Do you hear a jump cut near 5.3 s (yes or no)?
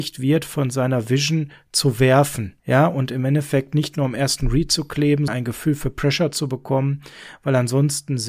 yes